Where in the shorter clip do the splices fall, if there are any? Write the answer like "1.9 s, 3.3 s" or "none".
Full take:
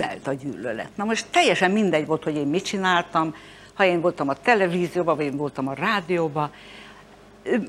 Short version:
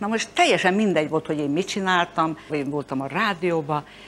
2.5 s